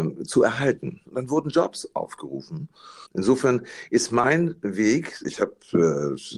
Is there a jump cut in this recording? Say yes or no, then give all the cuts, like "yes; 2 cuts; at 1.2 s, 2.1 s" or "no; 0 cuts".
yes; 3 cuts; at 1.0 s, 3.1 s, 5.2 s